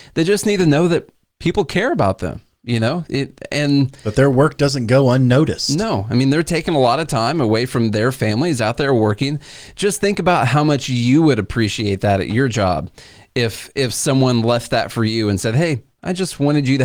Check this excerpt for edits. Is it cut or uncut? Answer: uncut